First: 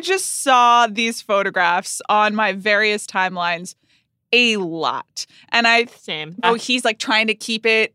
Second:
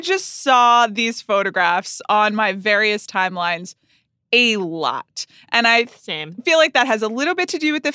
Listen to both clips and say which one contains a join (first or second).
first